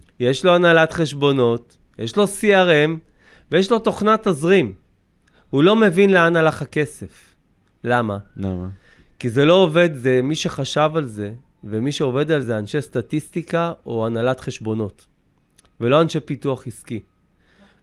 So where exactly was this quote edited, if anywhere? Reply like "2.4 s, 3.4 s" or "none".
12.4 s